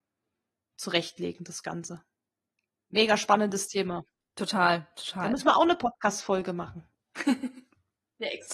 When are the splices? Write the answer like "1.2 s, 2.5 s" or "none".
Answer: none